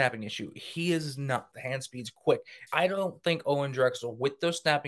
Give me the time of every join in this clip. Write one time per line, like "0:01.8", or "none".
0:01.5
0:02.7